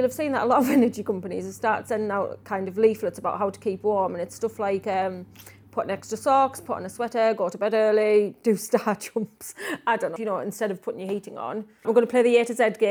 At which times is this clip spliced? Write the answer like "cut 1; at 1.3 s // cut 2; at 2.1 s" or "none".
cut 1; at 10.2 s // cut 2; at 11.8 s